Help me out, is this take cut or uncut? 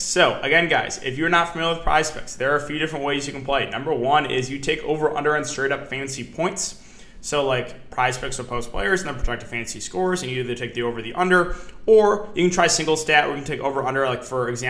uncut